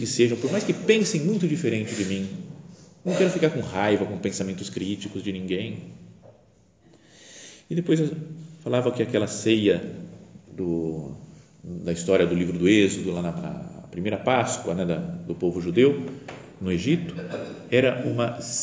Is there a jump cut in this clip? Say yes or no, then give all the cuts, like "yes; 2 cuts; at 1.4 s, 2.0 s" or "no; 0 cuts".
no; 0 cuts